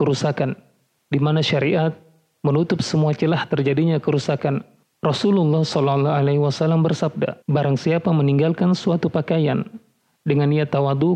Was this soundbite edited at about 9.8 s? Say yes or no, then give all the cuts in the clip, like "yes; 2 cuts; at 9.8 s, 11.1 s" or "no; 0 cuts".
no; 2 cuts; at 4.8 s, 7.4 s